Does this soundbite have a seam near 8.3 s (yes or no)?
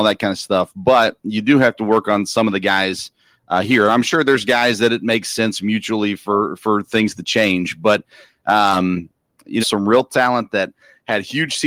no